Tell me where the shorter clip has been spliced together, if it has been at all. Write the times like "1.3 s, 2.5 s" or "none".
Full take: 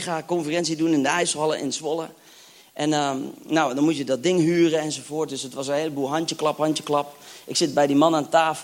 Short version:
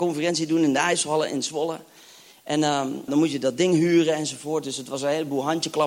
3.1 s